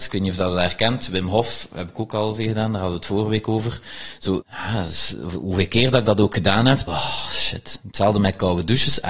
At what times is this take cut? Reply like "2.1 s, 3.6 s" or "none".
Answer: 4.4 s, 6.9 s